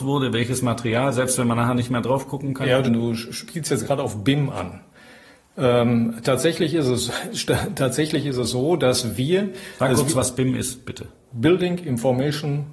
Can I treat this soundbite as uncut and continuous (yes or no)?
no